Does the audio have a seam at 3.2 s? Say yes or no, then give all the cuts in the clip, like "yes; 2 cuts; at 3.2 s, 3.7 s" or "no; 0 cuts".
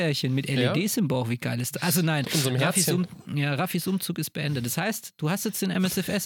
no; 0 cuts